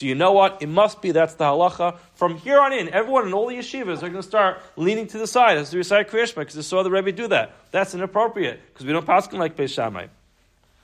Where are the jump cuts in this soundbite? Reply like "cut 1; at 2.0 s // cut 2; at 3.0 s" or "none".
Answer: none